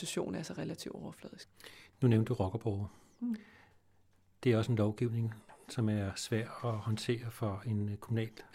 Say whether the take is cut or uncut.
uncut